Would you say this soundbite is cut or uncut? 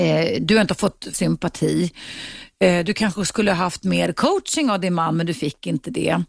cut